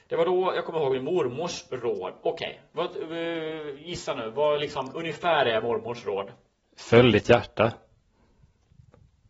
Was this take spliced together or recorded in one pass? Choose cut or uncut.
uncut